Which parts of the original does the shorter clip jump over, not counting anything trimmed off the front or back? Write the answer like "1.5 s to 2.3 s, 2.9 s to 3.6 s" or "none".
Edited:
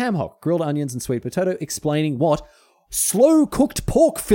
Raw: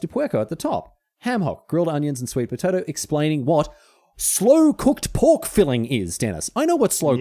none